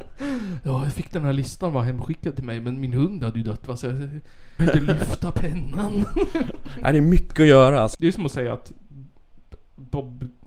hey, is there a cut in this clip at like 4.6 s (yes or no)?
yes